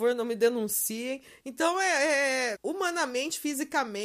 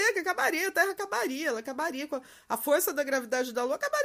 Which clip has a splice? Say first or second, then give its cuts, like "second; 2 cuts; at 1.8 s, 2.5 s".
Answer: first; 2 cuts; at 1.4 s, 2.6 s